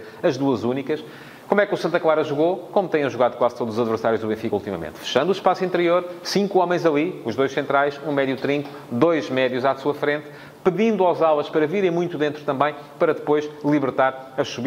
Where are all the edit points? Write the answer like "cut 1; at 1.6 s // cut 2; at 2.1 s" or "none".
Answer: none